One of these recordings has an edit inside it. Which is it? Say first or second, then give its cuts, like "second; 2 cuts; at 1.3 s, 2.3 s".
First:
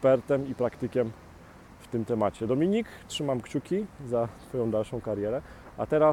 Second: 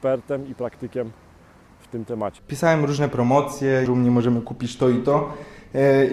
second; 2 cuts; at 2.4 s, 3.9 s